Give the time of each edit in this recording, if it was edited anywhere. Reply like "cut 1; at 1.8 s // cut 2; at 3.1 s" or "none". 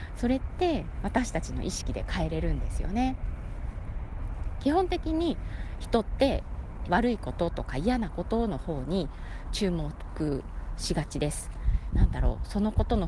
cut 1; at 6.8 s // cut 2; at 11.9 s